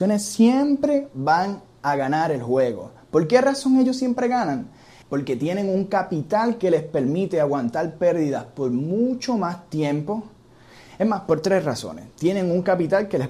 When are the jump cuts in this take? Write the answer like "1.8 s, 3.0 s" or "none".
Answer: 5.0 s

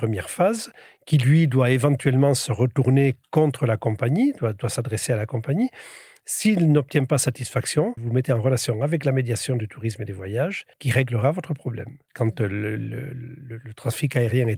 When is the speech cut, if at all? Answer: 8.0 s, 10.7 s, 12.1 s

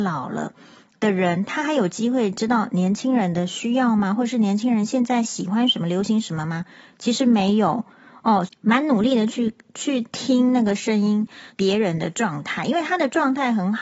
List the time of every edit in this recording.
8.5 s, 11.5 s

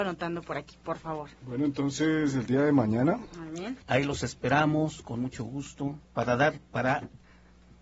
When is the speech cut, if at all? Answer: 1.4 s, 3.8 s, 6.0 s

